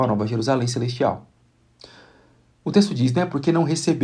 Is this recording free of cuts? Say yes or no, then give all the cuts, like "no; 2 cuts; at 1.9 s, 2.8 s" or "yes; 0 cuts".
yes; 0 cuts